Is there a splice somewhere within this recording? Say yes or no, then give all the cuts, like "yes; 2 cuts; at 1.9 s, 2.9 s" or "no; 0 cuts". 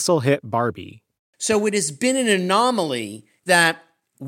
no; 0 cuts